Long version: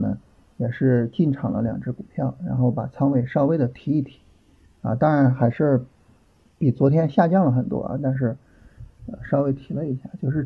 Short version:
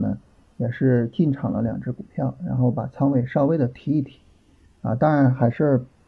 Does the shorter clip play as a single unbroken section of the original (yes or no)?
yes